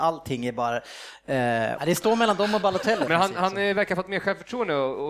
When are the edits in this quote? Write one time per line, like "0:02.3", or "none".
0:01.8
0:03.1